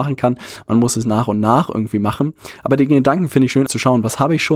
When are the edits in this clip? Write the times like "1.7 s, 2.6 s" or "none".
3.7 s